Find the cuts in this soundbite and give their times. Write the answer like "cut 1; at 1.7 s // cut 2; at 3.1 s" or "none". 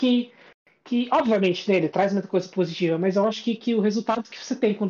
none